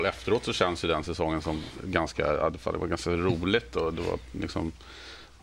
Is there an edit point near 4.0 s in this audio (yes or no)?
no